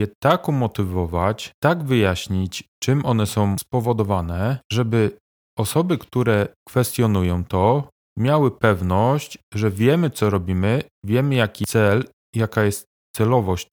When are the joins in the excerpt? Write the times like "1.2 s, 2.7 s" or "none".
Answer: none